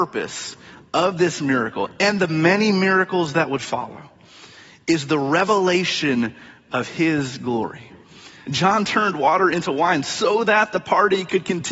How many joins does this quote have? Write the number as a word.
one